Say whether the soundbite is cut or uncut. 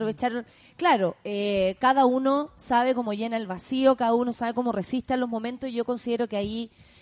uncut